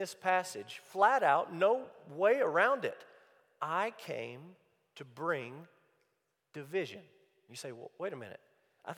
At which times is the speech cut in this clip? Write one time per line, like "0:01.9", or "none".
0:07.5